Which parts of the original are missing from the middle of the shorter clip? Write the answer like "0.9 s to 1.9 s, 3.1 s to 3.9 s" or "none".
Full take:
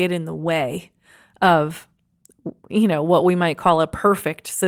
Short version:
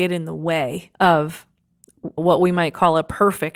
0.9 s to 1.4 s, 2.6 s to 3.0 s